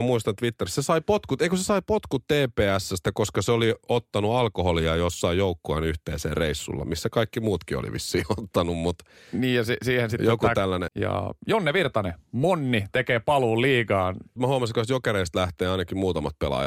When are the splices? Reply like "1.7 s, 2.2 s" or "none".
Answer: 10.9 s, 14.4 s

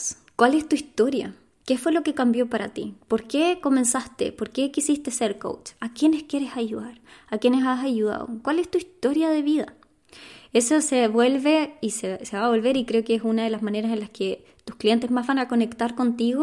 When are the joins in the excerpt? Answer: none

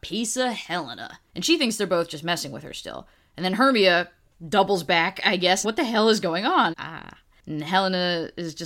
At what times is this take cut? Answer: 1.3 s, 5.6 s, 6.7 s

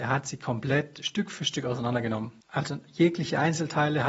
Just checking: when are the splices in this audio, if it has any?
2.4 s

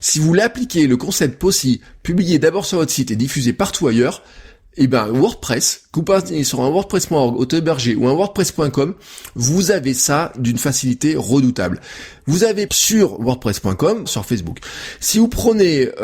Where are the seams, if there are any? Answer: 12.7 s, 14.1 s

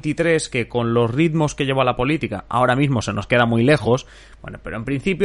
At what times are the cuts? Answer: none

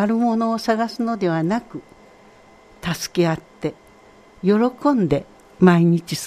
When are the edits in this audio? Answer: none

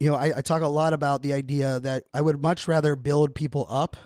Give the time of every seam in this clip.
2.1 s

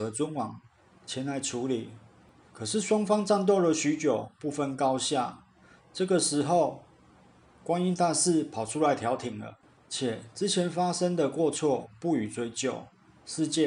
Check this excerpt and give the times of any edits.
9.8 s

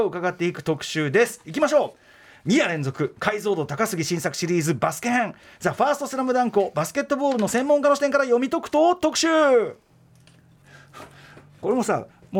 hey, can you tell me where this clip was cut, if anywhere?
none

